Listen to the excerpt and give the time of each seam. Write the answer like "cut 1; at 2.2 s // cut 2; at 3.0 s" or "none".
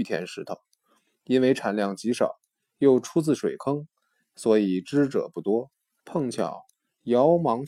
cut 1; at 6.0 s